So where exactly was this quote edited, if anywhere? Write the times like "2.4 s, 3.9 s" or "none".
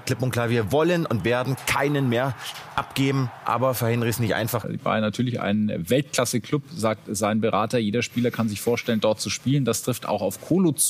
4.6 s